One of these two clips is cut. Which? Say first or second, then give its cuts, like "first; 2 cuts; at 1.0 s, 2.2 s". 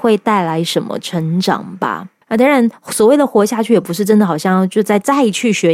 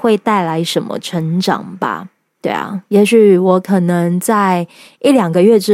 first; 1 cut; at 2.2 s